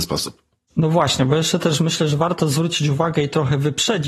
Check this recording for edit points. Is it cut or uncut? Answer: uncut